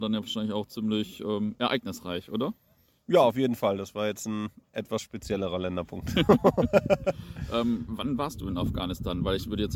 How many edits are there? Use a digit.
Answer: 0